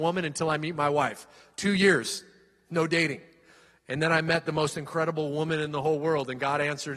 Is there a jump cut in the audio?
no; 0 cuts

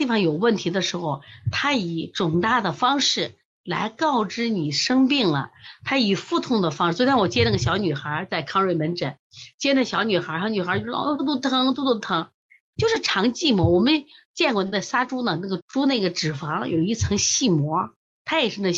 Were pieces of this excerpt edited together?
yes; 3 cuts; at 11.2 s, 12.7 s, 15.6 s

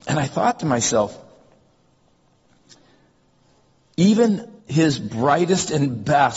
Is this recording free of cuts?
no; 1 cut; at 4.6 s

